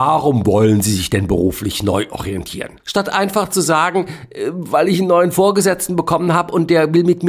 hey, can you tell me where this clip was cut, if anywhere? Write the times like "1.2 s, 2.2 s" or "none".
2.8 s